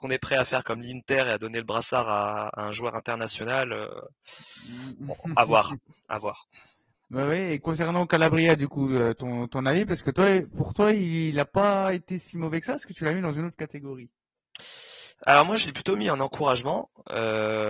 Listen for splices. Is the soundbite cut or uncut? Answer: uncut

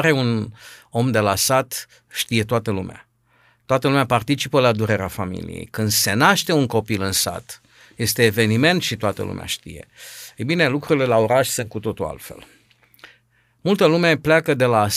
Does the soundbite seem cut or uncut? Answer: uncut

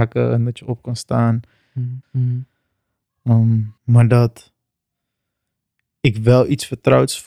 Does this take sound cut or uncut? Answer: cut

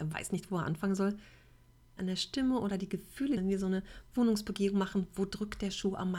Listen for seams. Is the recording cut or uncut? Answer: cut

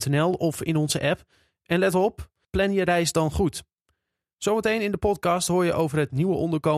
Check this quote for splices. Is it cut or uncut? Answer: cut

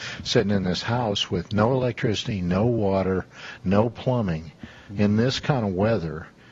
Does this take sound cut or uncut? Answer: uncut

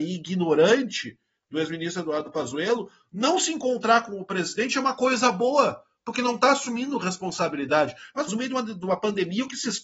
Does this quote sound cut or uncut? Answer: cut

